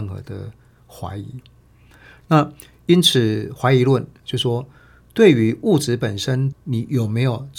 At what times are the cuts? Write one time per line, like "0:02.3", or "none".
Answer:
0:06.5